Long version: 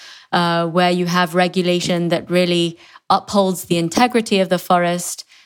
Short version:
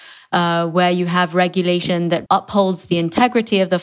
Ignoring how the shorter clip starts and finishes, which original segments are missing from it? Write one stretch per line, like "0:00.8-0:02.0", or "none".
0:02.3-0:03.1